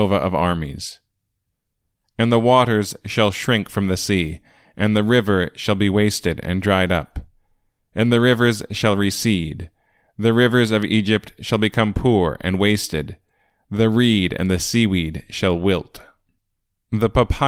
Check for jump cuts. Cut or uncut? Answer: uncut